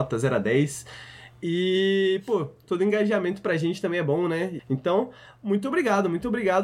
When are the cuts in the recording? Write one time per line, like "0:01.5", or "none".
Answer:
0:04.6